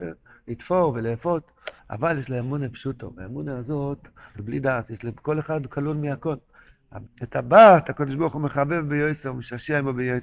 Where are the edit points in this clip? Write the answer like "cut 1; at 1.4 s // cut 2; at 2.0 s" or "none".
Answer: cut 1; at 1.8 s // cut 2; at 4.3 s // cut 3; at 7.1 s